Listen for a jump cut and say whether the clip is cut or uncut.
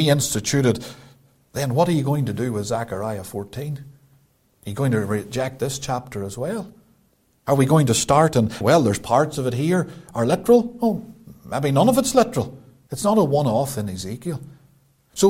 cut